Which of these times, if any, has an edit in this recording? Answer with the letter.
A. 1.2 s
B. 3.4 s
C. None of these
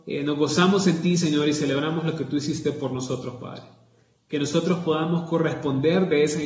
C